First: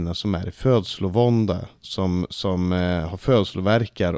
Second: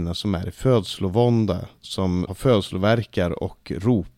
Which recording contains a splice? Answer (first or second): second